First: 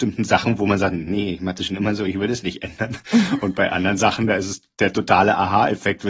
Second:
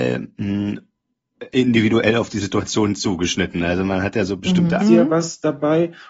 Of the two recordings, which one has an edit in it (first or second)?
second